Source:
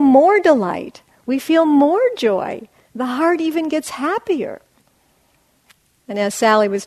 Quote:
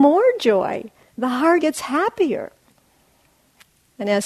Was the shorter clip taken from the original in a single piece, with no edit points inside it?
no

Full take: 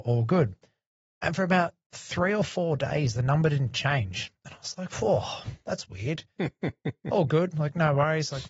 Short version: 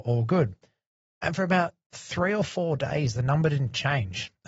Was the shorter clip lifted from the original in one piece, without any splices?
yes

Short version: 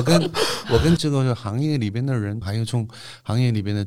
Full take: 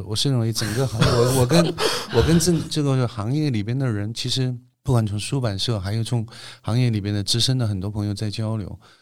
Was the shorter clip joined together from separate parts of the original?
yes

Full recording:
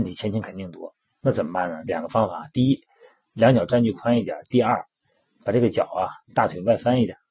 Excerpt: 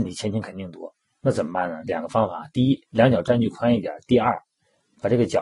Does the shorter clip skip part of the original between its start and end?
yes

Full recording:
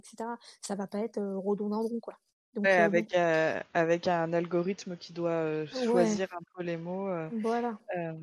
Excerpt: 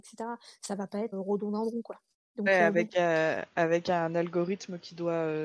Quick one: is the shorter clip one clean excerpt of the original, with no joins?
no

